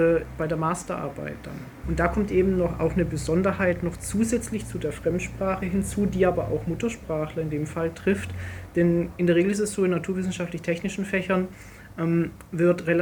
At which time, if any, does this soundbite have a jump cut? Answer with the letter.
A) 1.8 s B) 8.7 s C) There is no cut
A